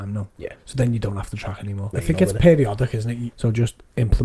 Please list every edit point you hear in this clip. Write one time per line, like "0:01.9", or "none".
0:01.9
0:03.3